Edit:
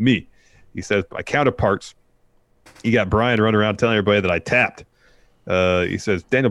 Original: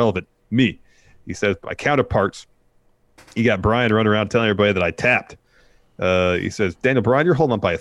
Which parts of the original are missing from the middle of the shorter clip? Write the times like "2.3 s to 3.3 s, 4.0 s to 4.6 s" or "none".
none